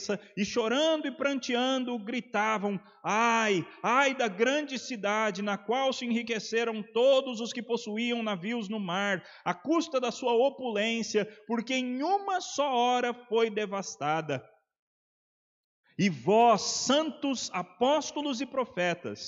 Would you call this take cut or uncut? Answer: cut